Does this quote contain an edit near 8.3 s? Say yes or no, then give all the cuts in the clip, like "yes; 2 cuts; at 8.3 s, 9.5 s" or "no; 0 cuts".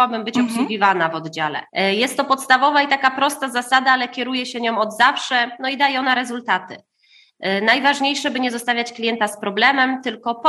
no; 1 cut; at 1.7 s